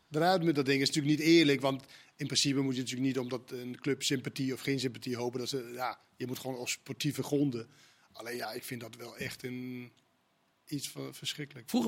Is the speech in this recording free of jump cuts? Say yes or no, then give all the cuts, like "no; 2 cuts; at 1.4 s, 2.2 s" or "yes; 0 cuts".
yes; 0 cuts